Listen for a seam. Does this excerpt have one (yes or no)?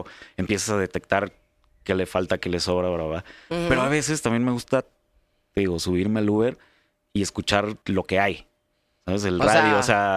yes